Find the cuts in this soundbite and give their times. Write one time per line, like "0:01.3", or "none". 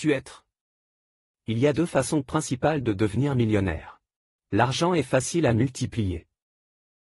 0:04.4